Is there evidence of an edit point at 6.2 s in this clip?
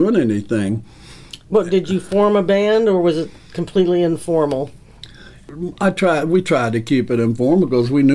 no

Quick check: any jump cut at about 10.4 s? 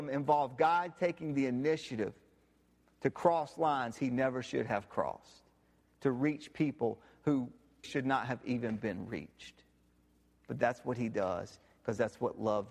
no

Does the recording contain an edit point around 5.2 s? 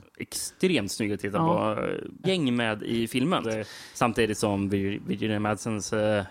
no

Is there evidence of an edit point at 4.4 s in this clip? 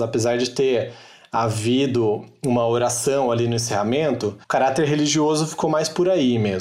yes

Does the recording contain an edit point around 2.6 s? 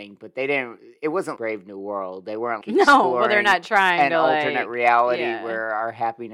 yes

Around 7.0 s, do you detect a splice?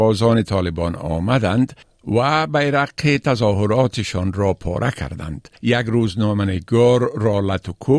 no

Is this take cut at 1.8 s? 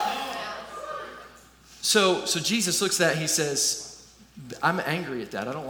no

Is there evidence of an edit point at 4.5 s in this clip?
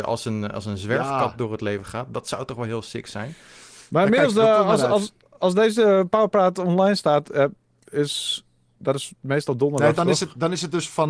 no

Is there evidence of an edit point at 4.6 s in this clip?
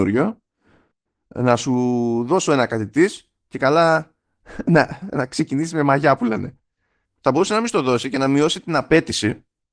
no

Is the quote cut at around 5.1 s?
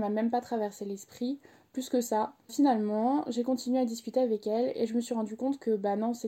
no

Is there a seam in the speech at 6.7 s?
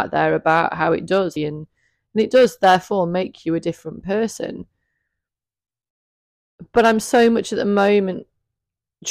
no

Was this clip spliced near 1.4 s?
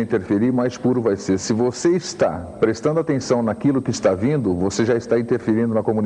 no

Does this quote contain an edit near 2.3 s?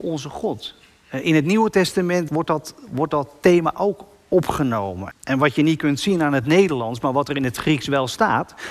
yes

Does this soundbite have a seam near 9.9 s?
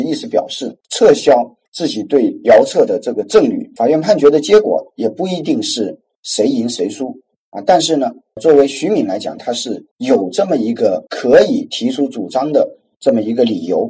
yes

